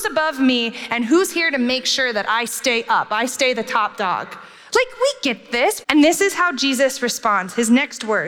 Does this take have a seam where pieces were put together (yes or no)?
yes